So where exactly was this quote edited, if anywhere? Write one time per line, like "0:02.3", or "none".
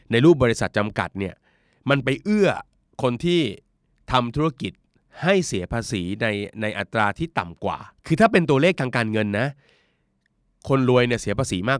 0:08.0